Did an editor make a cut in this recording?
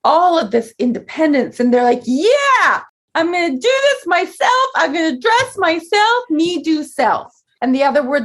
no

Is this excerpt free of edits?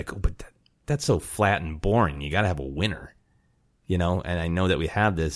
yes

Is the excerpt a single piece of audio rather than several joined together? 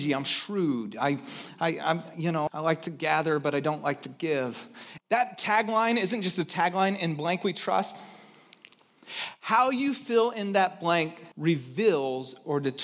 no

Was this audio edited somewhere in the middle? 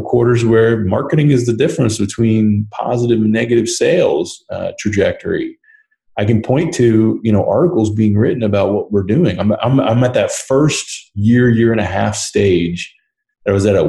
no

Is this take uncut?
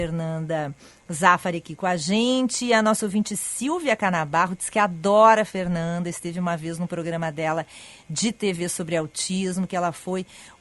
yes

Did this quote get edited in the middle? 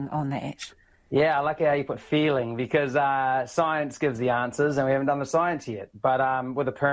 no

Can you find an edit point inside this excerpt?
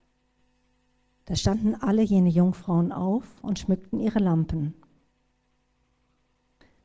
yes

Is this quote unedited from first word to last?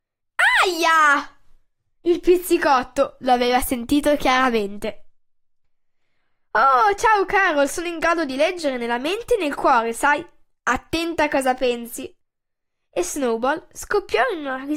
yes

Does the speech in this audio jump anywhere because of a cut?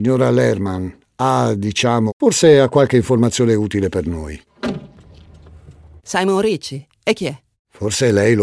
yes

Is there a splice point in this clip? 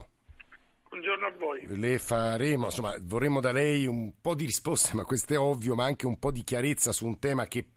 no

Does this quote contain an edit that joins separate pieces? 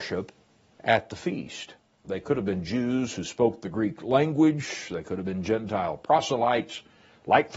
yes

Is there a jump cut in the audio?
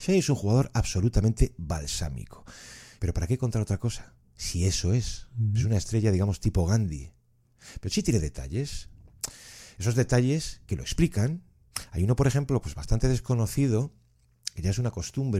yes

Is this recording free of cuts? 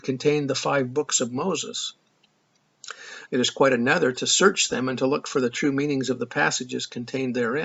no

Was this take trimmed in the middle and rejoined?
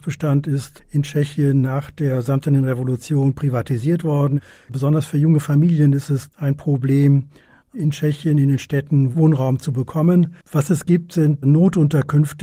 yes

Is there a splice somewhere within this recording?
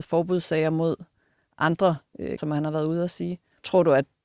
yes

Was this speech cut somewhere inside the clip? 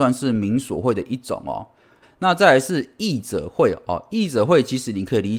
yes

